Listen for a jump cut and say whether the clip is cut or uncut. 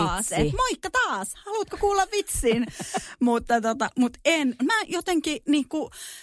cut